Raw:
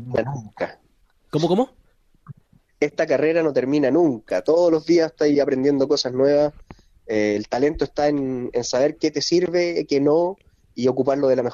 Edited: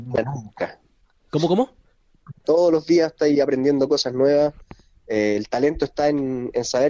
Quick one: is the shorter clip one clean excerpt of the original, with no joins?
no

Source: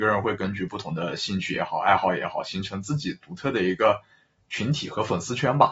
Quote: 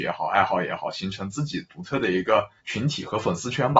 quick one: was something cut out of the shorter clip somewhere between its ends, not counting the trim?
yes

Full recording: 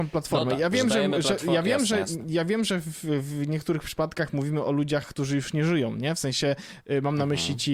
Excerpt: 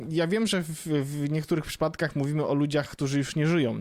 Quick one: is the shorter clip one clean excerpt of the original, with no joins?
yes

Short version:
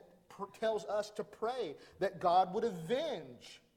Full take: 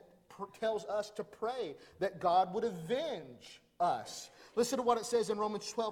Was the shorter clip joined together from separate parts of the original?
no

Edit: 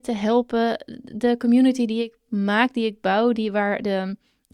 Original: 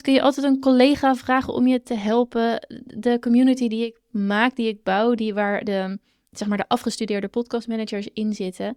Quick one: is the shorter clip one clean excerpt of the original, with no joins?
yes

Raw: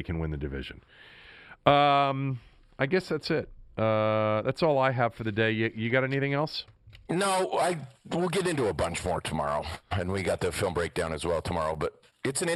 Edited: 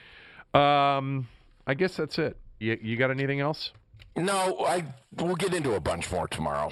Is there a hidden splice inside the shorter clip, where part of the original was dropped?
yes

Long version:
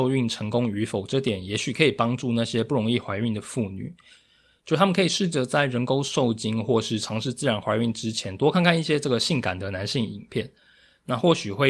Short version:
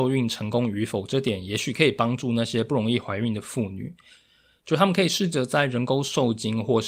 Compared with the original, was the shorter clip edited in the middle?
no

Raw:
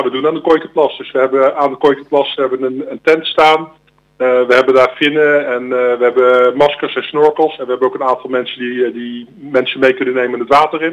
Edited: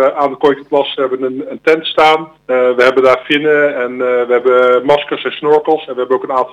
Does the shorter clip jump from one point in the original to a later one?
yes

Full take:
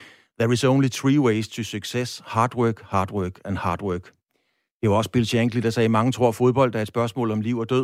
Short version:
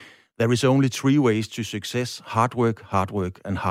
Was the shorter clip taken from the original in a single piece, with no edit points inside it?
yes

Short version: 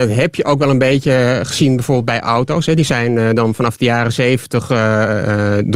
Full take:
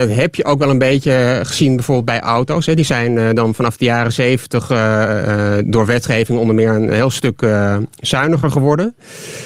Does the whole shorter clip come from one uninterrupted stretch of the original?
yes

